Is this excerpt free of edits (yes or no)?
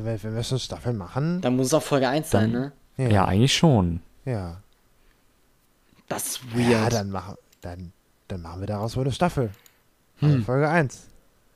yes